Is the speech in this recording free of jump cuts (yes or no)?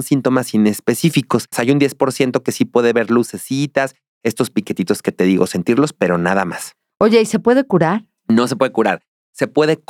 no